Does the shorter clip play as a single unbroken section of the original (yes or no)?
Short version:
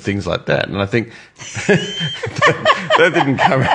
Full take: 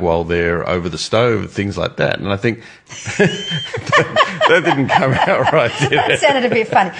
yes